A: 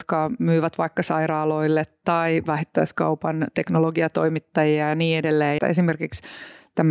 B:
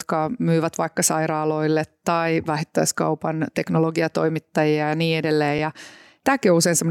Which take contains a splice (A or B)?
A